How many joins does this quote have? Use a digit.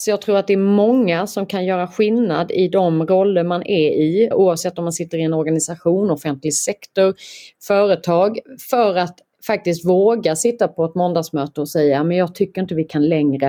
1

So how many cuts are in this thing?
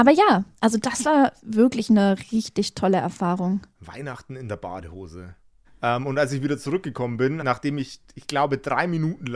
2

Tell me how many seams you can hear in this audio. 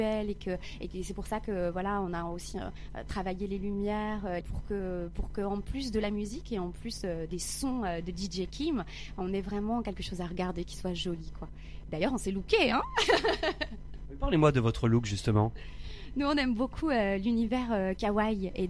1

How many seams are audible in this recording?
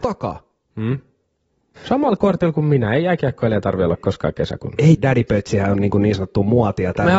2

